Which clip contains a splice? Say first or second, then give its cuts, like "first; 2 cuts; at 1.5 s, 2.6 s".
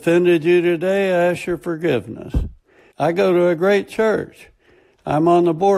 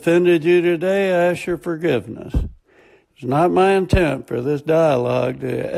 first; 1 cut; at 2.9 s